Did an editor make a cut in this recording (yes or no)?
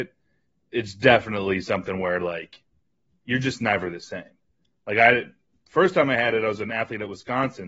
no